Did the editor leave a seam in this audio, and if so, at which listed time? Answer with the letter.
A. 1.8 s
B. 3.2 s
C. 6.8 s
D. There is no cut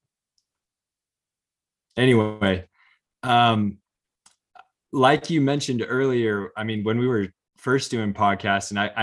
A